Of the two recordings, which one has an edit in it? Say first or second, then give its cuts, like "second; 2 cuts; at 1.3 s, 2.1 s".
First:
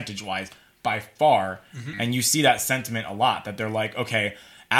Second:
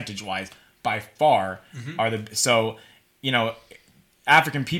first; 1 cut; at 1.9 s